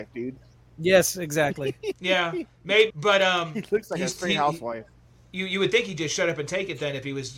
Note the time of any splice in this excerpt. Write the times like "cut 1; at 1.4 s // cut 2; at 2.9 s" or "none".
cut 1; at 2.9 s